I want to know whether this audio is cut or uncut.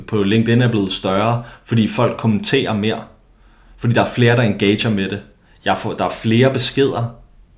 uncut